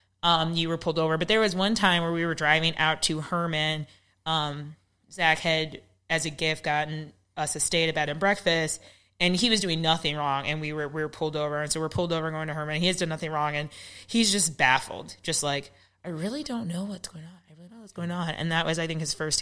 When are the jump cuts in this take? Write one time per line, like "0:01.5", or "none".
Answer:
none